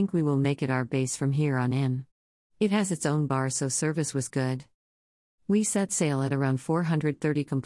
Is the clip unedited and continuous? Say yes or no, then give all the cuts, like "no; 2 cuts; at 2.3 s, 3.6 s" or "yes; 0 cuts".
yes; 0 cuts